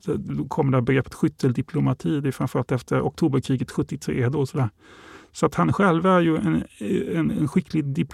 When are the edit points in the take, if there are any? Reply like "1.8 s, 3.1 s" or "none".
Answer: none